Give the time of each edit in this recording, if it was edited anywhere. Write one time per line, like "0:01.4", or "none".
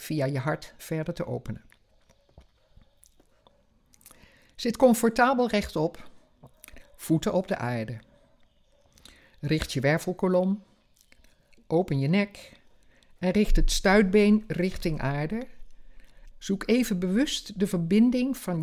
0:16.3